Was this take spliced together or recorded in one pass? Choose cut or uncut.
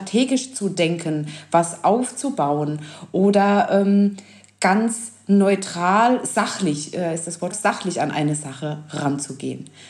cut